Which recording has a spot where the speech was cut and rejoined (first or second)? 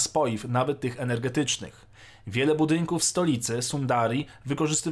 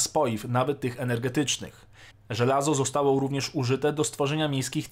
second